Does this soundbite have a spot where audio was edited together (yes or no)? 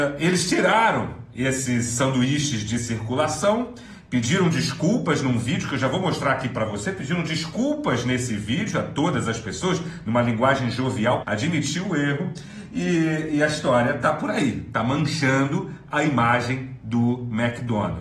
yes